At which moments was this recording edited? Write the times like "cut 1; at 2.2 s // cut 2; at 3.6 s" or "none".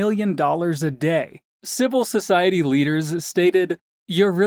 cut 1; at 1.5 s